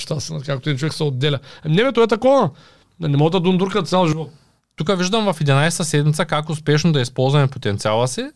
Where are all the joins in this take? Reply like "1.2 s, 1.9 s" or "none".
4.6 s